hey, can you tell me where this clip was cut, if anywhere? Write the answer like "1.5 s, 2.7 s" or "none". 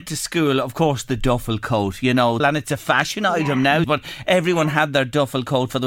2.4 s, 3.8 s